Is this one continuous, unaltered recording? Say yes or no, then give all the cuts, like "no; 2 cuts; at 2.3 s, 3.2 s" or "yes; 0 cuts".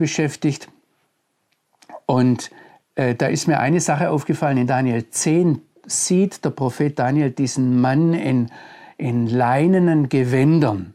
yes; 0 cuts